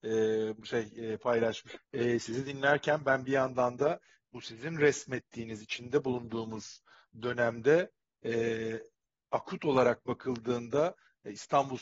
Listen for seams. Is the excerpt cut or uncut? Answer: cut